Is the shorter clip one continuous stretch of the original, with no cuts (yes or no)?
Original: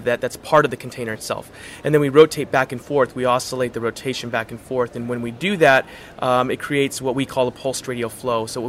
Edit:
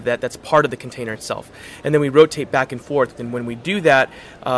no